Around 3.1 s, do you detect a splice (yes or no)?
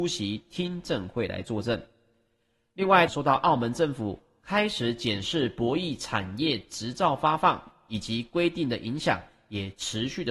yes